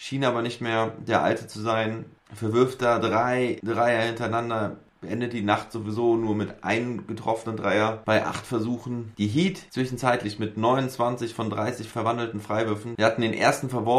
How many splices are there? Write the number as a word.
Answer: zero